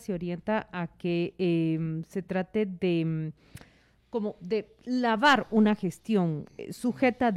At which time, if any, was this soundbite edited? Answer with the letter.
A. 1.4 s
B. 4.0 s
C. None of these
C